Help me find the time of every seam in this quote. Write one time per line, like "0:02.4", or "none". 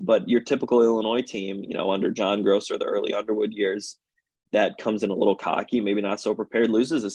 none